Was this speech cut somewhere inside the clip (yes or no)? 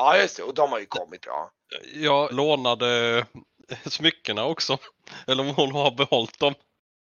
yes